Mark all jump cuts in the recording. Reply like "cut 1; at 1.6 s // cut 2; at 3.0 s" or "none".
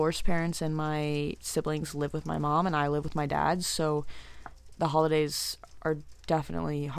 none